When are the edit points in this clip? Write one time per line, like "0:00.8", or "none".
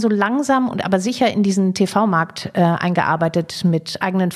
none